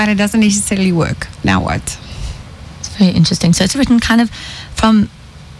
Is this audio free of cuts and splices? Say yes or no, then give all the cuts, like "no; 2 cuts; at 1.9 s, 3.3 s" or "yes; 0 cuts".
no; 1 cut; at 3.7 s